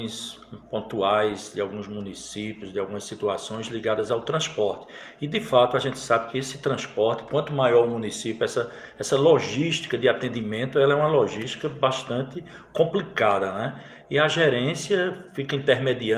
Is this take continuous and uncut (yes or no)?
yes